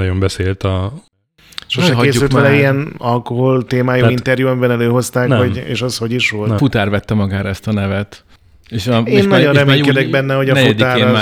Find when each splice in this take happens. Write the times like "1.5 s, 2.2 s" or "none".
6.6 s